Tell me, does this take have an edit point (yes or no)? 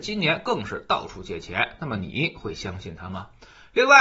no